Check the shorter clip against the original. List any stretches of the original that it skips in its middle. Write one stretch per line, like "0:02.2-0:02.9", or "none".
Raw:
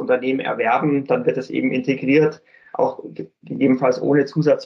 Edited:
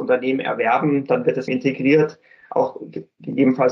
0:01.5-0:01.7